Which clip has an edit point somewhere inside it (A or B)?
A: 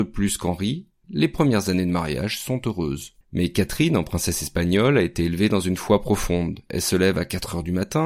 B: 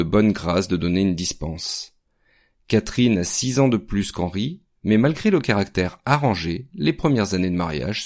A